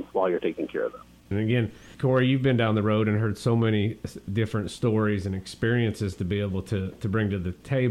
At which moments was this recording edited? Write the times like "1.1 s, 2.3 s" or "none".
1.3 s